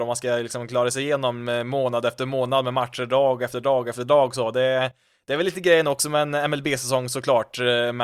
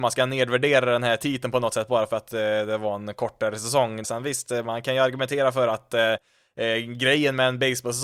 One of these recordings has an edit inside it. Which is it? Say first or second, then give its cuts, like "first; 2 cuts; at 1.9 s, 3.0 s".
second; 1 cut; at 4.0 s